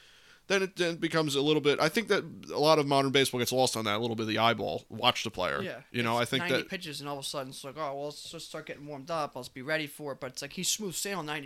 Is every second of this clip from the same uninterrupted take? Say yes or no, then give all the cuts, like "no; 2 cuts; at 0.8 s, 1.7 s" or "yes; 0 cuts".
yes; 0 cuts